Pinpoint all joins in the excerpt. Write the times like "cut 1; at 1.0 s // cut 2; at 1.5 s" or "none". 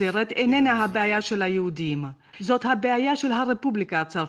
cut 1; at 2.3 s